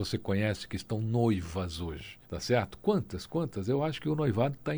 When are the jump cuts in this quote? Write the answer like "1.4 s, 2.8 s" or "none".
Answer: 2.2 s